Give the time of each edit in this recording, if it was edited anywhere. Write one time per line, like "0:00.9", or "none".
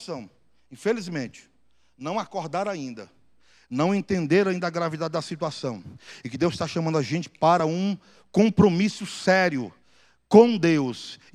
none